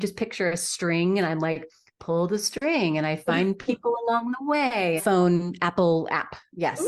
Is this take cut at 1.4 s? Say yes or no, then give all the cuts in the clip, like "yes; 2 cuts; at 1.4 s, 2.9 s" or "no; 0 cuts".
no; 1 cut; at 5.0 s